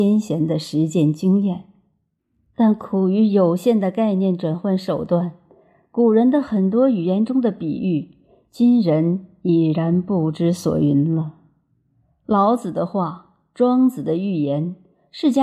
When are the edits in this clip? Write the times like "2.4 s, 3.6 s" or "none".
none